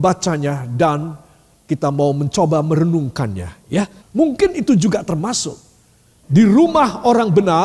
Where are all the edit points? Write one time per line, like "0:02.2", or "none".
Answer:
0:04.0
0:06.2